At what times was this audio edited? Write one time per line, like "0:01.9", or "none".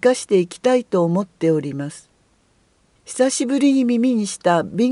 0:03.0